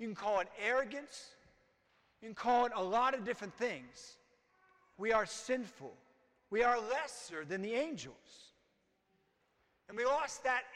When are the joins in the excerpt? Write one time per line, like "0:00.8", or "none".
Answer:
0:04.9